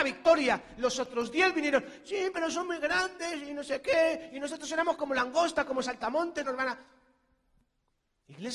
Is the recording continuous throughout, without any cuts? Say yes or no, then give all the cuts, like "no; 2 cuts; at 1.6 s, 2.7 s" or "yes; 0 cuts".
no; 1 cut; at 6.4 s